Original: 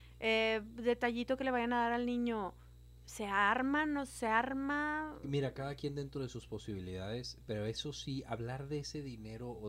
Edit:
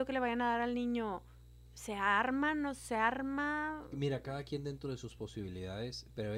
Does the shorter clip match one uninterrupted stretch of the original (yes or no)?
yes